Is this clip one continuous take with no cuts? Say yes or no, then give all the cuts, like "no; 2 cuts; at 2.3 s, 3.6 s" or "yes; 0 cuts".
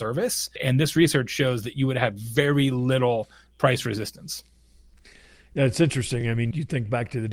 yes; 0 cuts